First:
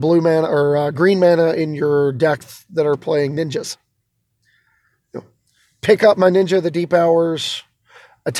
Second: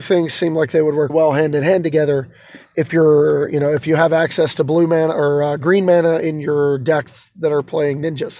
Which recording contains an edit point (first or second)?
second